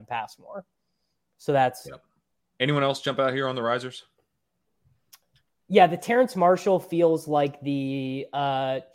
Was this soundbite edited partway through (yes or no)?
yes